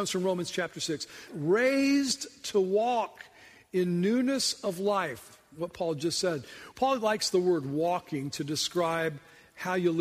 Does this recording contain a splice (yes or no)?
yes